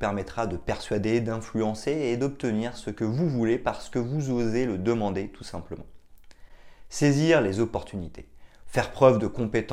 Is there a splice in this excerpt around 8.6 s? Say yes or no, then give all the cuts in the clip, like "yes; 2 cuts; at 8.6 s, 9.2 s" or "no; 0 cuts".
yes; 1 cut; at 8.6 s